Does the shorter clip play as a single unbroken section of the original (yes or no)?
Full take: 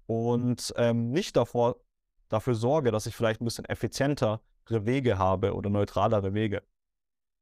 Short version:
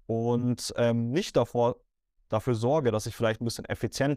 yes